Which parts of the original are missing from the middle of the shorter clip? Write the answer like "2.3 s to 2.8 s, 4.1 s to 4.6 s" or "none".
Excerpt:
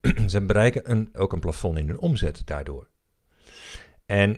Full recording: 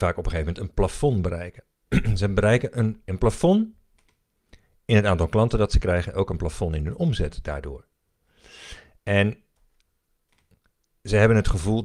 3.0 s to 6.1 s